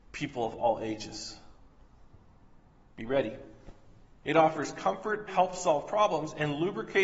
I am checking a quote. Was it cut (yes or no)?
yes